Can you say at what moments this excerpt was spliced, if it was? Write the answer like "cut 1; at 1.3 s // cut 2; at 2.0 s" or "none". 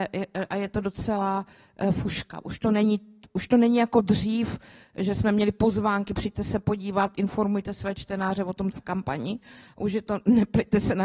cut 1; at 8.7 s